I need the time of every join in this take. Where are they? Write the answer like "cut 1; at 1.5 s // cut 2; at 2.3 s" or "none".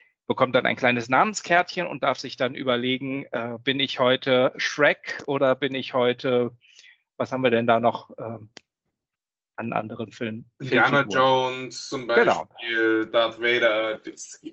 none